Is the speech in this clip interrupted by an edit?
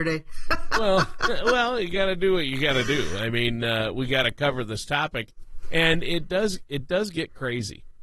no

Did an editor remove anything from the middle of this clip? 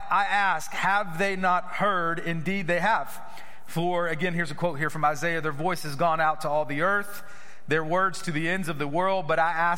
no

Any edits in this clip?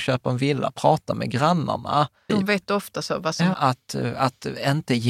yes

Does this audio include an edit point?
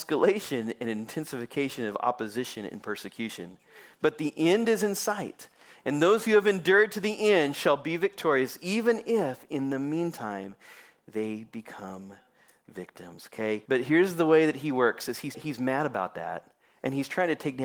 yes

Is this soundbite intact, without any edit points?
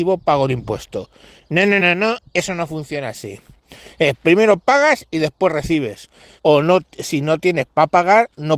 no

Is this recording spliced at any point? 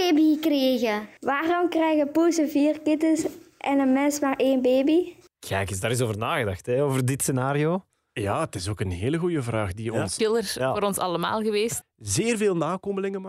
yes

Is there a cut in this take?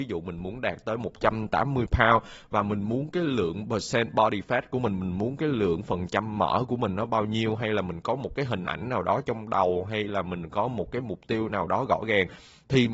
no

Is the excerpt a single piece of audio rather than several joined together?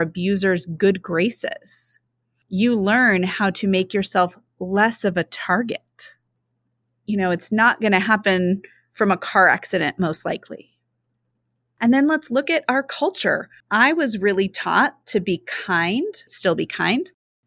no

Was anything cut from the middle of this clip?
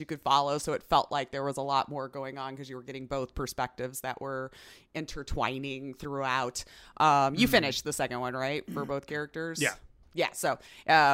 no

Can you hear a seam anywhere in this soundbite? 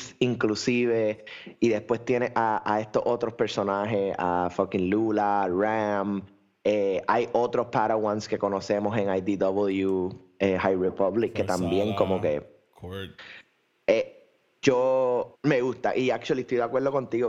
yes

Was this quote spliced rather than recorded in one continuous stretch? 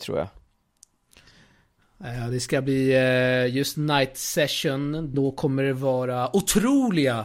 yes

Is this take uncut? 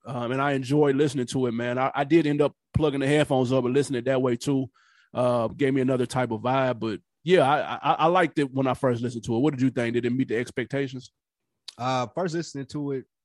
yes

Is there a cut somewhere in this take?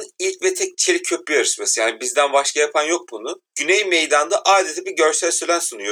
yes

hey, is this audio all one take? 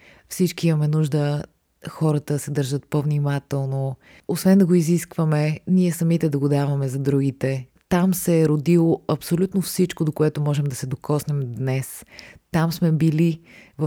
no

